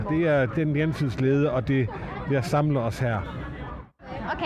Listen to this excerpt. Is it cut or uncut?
uncut